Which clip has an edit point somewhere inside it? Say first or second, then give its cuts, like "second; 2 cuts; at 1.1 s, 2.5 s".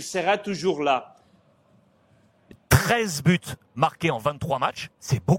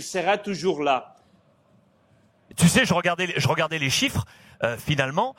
first; 1 cut; at 2.5 s